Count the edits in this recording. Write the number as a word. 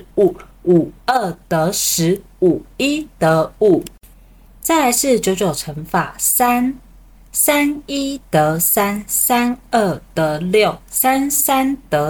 one